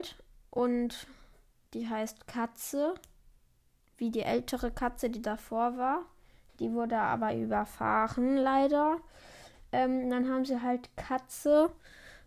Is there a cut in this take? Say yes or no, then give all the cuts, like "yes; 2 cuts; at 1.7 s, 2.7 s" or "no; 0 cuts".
no; 0 cuts